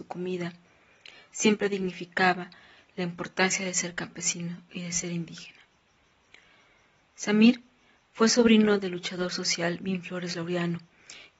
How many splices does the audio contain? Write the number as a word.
zero